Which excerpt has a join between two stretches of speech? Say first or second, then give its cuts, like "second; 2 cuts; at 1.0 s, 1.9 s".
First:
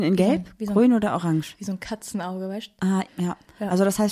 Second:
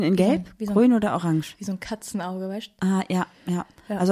first; 1 cut; at 3.1 s